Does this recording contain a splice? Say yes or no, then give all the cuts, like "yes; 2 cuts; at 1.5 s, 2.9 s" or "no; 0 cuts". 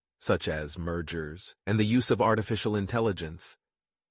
yes; 1 cut; at 1.6 s